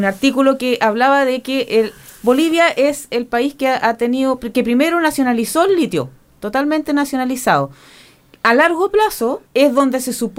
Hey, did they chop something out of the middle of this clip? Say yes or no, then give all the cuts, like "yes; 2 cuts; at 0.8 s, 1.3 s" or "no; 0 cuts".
yes; 1 cut; at 9.5 s